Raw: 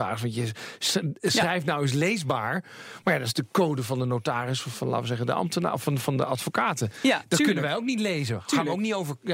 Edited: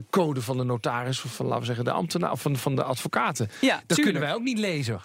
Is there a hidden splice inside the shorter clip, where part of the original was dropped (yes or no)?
no